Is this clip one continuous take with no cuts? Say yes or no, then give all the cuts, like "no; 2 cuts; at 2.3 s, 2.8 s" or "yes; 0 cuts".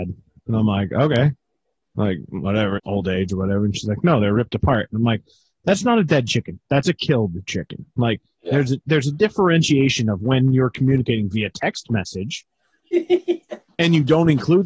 no; 1 cut; at 2.8 s